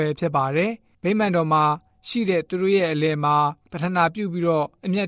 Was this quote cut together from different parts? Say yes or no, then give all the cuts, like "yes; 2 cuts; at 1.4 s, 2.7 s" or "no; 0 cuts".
no; 0 cuts